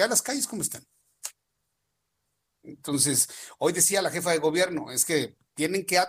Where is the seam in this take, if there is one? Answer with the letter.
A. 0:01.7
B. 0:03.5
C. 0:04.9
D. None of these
D